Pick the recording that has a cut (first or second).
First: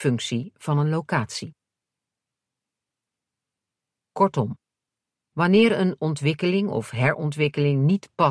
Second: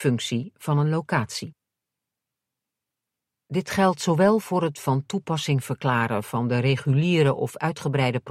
second